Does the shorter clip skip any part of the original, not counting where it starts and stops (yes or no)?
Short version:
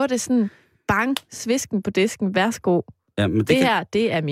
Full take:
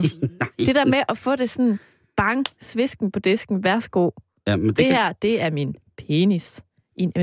no